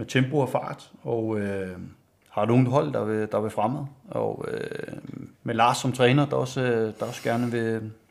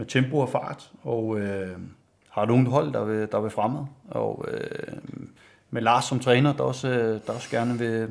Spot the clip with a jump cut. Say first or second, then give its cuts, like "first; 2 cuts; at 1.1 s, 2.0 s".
first; 1 cut; at 5.3 s